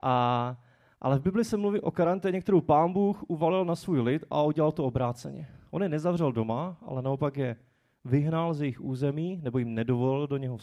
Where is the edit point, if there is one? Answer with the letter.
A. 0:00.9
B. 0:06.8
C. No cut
C